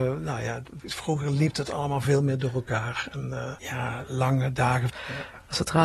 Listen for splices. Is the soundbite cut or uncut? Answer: cut